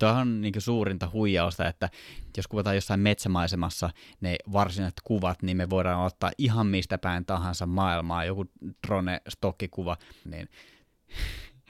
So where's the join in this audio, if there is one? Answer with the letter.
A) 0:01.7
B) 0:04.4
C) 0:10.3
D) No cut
C